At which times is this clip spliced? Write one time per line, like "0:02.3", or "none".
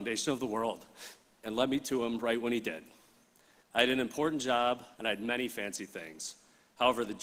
0:03.6
0:04.9